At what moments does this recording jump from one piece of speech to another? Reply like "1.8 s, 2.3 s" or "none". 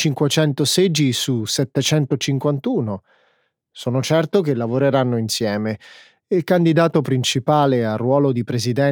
none